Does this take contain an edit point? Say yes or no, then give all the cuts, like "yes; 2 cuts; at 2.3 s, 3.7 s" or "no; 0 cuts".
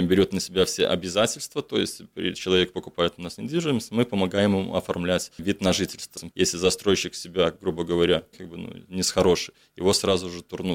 yes; 2 cuts; at 6.3 s, 8.3 s